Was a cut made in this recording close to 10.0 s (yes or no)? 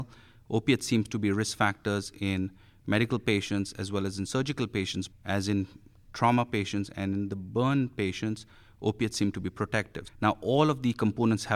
yes